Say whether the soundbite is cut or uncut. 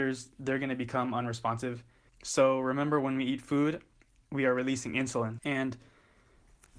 cut